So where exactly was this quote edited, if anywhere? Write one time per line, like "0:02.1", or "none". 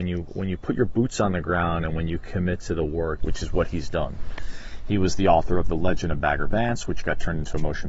0:03.2